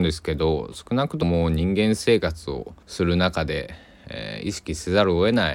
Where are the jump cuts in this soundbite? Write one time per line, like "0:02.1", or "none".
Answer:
0:01.2
0:02.8